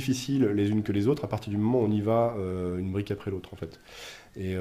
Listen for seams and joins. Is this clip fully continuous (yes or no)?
yes